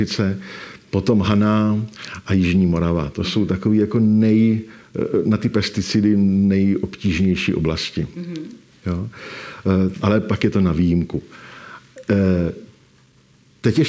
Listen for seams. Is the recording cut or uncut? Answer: cut